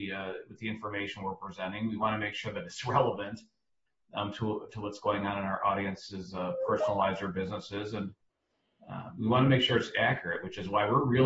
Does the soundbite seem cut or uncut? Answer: uncut